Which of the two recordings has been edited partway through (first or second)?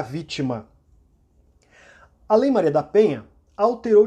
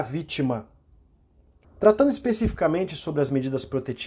second